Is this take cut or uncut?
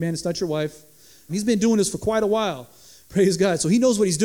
cut